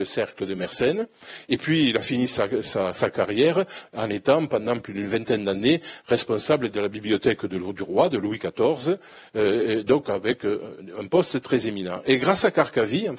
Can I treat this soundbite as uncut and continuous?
yes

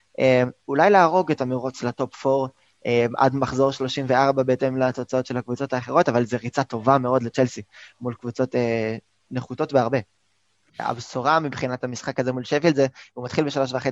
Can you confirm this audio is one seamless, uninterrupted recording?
no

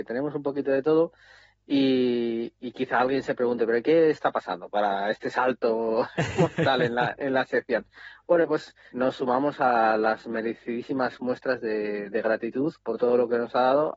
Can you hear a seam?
no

